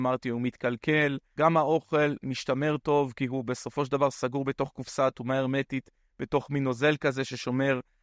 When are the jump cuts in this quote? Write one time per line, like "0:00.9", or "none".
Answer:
0:01.4